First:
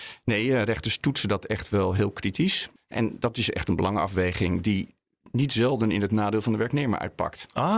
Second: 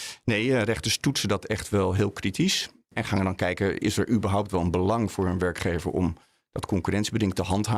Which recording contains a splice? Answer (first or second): first